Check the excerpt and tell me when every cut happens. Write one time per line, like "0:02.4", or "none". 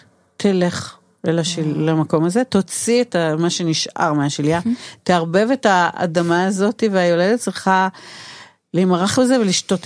none